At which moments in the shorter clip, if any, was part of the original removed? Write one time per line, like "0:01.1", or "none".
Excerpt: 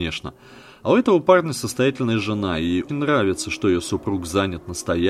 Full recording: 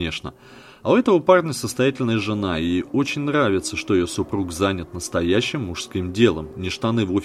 0:02.9

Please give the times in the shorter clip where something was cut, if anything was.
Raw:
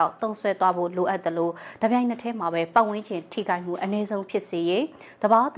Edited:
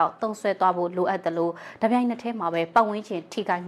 none

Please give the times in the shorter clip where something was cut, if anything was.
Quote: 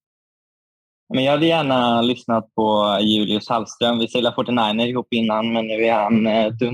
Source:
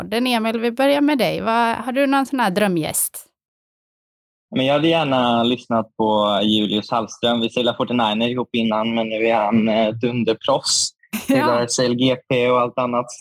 none

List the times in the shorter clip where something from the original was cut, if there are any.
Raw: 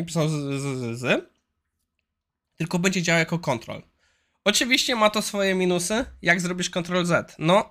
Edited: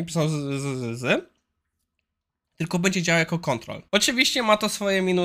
0:03.9

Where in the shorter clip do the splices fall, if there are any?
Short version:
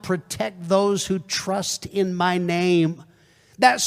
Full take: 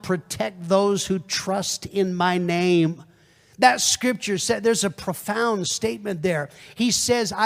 none

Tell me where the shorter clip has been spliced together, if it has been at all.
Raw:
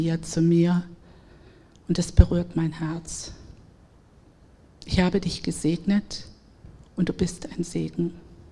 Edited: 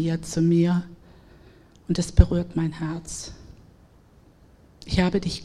none

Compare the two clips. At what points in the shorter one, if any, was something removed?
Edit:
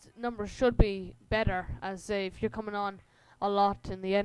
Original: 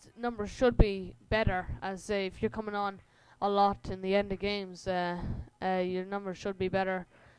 none

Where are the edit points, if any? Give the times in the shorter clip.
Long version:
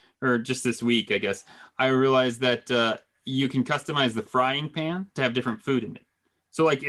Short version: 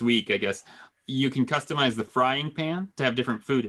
0:00.9

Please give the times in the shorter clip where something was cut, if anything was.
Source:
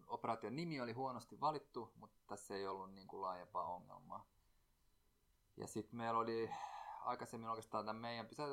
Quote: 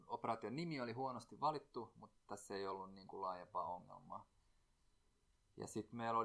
none

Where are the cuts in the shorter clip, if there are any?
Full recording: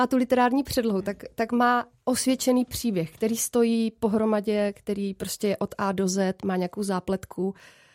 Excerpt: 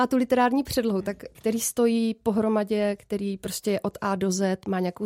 0:01.3

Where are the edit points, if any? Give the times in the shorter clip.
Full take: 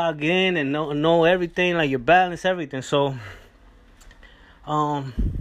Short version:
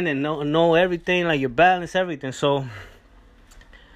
none

